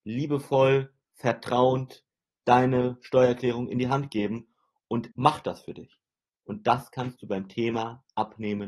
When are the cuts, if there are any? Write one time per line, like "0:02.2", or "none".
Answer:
0:05.1